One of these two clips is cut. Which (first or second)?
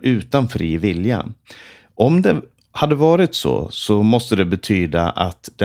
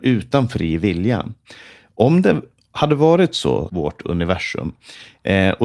second